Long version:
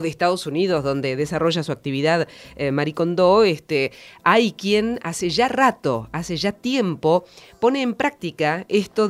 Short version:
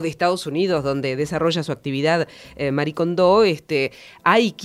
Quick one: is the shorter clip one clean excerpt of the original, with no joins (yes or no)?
yes